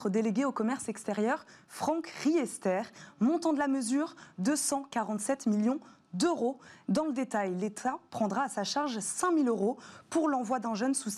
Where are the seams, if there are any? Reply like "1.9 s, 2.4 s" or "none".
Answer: 6.8 s